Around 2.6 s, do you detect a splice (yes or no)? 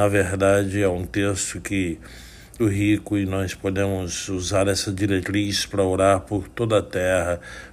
yes